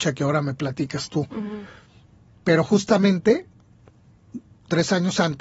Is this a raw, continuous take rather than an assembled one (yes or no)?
yes